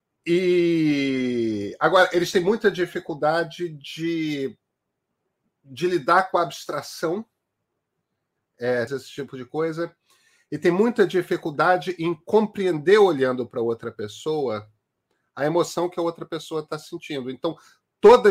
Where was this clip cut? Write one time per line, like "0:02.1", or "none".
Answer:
0:08.9